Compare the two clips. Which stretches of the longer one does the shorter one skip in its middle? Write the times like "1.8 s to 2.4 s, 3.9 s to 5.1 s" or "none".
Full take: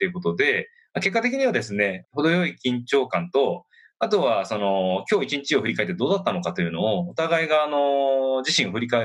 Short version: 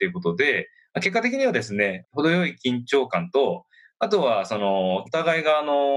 5.0 s to 7.1 s